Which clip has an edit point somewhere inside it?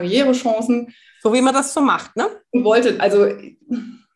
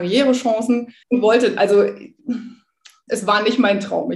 second; 2 cuts; at 1.0 s, 3.1 s

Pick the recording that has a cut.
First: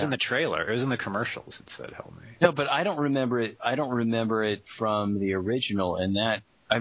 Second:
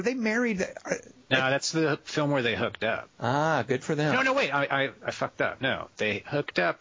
second; 1 cut; at 3.1 s

